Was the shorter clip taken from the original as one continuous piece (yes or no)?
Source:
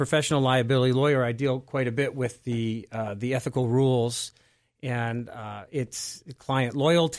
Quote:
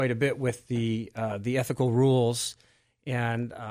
yes